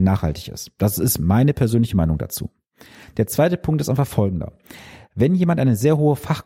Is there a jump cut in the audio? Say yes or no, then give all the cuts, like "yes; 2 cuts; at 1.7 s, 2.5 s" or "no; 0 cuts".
no; 0 cuts